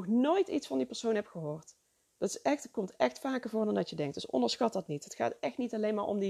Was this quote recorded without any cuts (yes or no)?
yes